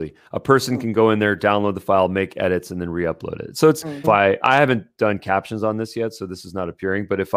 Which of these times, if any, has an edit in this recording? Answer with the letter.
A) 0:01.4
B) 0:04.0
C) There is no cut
B